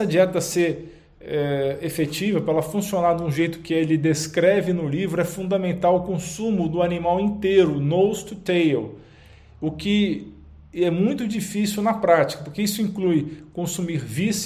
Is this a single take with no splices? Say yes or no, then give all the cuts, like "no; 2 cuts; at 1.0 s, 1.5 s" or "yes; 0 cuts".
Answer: yes; 0 cuts